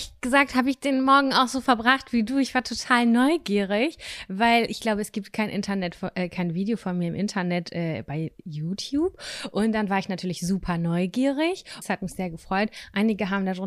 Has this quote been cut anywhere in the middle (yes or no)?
yes